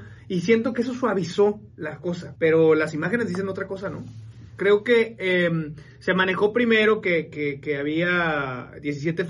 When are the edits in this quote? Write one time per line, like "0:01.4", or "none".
0:02.3
0:04.6